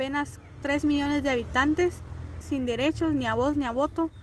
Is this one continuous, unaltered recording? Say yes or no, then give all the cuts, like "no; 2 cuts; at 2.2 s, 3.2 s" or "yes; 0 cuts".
no; 1 cut; at 2.4 s